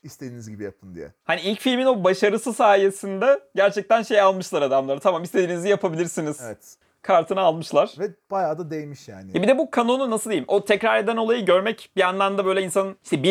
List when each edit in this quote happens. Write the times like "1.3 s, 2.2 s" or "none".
none

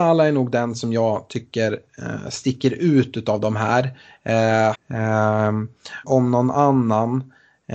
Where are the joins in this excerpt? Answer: 4.7 s, 6.0 s

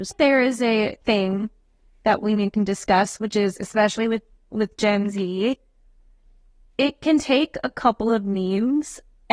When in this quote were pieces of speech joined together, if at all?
1.0 s

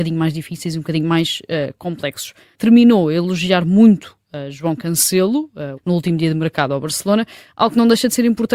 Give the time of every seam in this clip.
2.5 s, 5.8 s

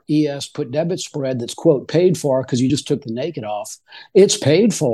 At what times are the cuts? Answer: none

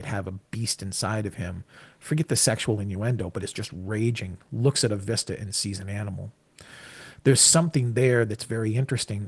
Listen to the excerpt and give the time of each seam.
none

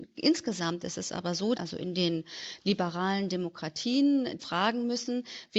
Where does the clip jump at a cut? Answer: 1.5 s, 4.4 s

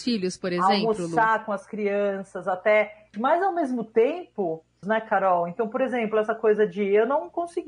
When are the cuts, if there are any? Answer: 3.1 s, 4.8 s

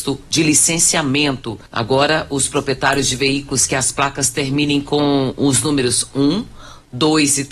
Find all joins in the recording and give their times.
1.7 s

